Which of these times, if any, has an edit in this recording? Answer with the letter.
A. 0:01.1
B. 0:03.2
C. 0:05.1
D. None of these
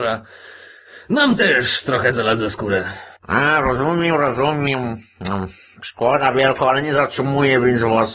B